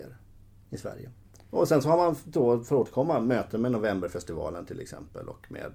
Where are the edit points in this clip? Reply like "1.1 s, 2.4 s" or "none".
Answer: none